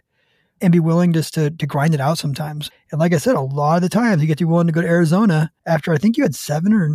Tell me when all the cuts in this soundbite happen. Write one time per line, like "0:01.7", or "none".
0:02.7
0:05.6